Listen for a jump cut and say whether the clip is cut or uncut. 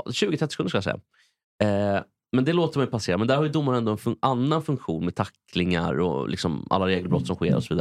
uncut